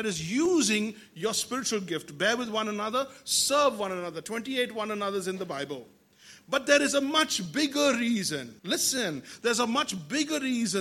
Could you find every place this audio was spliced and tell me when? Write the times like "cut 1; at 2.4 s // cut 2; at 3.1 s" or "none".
cut 1; at 8.6 s